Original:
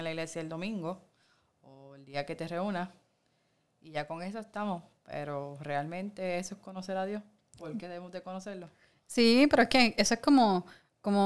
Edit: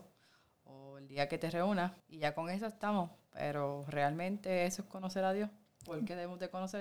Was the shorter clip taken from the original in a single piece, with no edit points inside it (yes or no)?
no